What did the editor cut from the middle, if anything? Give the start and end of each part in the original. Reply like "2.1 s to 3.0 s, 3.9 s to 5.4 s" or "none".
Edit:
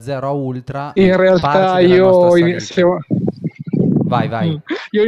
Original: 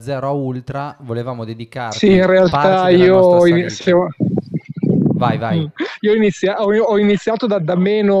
1.0 s to 2.1 s